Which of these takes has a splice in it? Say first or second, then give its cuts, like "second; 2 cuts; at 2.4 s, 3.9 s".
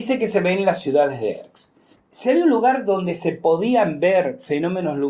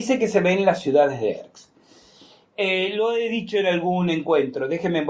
first; 1 cut; at 1.9 s